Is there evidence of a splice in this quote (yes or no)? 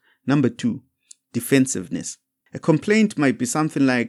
yes